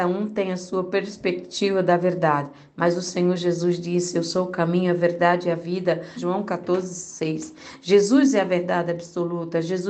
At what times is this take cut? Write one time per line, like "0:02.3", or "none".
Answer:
0:06.2